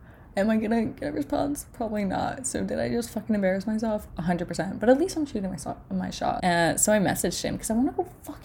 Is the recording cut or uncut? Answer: cut